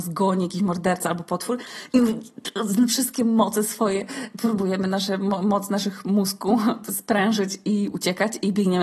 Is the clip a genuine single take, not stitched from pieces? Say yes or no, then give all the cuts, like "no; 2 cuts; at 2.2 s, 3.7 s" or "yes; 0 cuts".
yes; 0 cuts